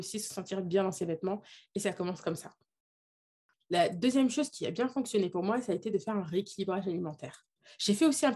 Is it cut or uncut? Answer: uncut